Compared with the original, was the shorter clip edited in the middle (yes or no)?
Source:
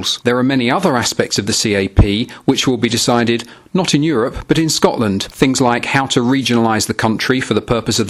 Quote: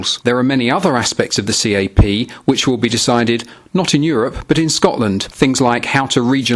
no